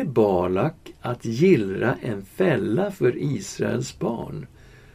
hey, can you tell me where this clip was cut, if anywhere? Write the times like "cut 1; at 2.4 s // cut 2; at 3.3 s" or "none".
none